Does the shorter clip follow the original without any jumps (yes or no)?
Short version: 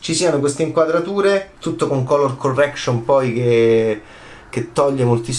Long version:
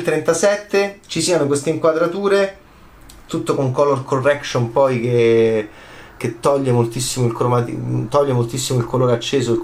no